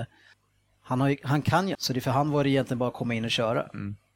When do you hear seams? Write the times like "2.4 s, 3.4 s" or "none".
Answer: 1.7 s